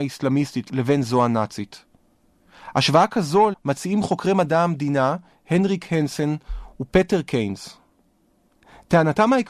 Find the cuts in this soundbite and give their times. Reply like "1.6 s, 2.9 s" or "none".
3.5 s